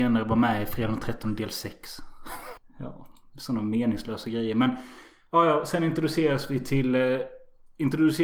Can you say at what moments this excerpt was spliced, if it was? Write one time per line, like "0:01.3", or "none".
0:02.6